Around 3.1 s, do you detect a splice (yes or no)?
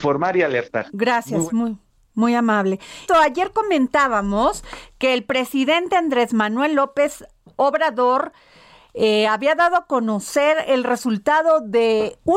yes